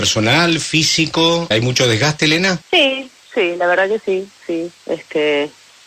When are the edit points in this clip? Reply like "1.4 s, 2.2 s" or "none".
1.5 s, 2.6 s